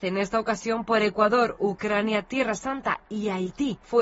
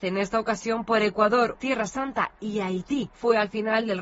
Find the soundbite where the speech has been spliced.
second; 1 cut; at 1.5 s

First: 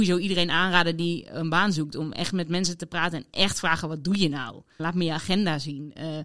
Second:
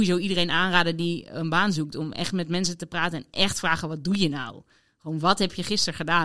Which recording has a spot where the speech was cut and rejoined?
first; 1 cut; at 4.8 s

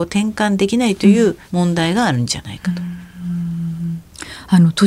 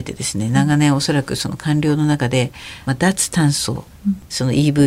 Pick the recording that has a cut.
first; 1 cut; at 1.4 s

